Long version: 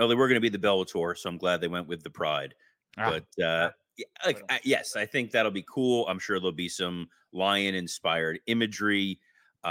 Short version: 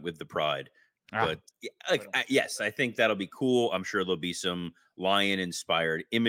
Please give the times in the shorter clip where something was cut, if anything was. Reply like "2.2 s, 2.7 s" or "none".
1.5 s